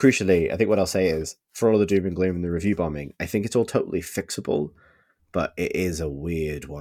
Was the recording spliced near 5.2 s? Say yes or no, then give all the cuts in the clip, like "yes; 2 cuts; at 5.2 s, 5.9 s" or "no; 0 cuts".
yes; 1 cut; at 5.2 s